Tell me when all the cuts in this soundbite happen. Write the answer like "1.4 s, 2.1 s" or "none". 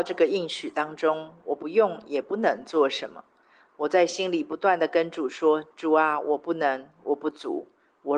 none